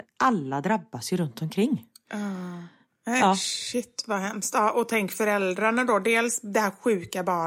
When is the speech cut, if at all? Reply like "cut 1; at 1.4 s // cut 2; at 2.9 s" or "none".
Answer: none